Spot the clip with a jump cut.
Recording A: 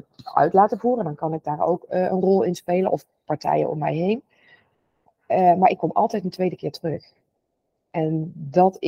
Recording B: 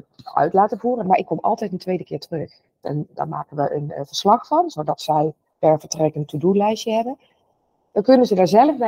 B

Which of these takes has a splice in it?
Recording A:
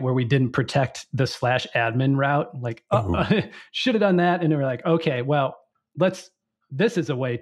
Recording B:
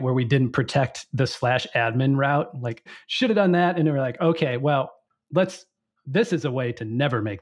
B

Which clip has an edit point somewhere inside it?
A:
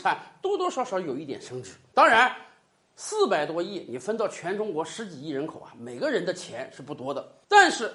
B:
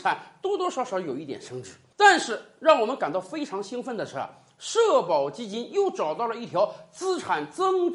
B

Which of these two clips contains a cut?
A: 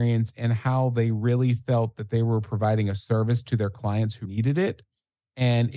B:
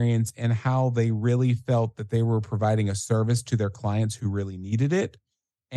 A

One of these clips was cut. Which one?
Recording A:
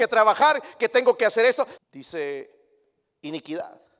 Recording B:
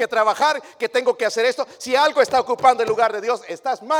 A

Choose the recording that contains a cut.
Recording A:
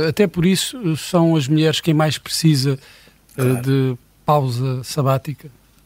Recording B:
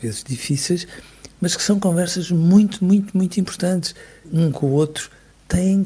B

